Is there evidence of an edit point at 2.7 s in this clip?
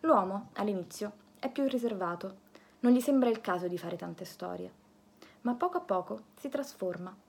yes; 1 cut; at 2.7 s

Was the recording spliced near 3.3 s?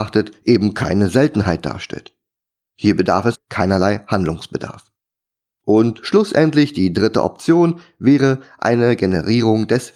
yes; 1 cut; at 3.3 s

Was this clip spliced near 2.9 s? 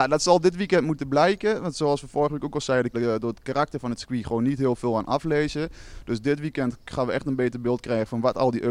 yes; 1 cut; at 2.9 s

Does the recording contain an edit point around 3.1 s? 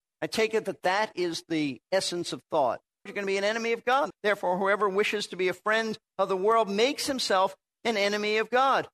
yes; 2 cuts; at 3.1 s, 4.1 s

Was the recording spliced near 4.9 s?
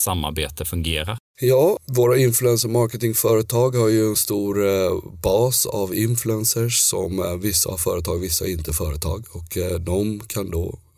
no; 1 cut; at 1.3 s

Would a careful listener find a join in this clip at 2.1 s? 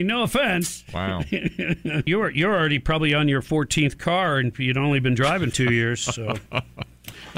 yes; 2 cuts; at 2.1 s, 5.5 s

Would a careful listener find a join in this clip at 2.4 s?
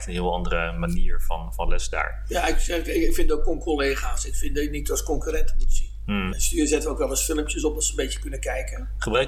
no; 1 cut; at 6.3 s

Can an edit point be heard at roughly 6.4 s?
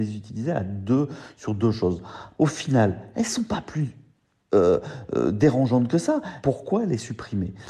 yes; 2 cuts; at 2.3 s, 6.4 s

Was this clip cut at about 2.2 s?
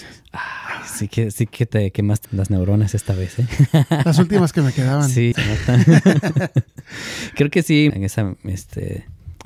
yes; 3 cuts; at 2.2 s, 5.3 s, 7.9 s

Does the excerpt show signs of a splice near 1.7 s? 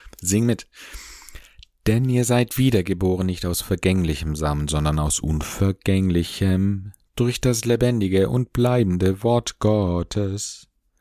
no; 0 cuts

